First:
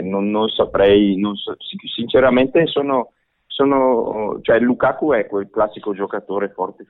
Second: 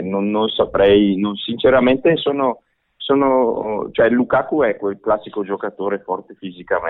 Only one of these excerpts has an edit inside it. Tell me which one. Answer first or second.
second